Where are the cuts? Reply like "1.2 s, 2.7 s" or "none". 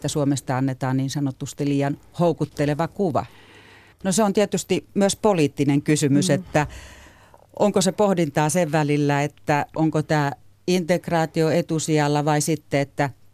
3.9 s